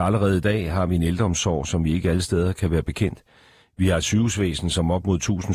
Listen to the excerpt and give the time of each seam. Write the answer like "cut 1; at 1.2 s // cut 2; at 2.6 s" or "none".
none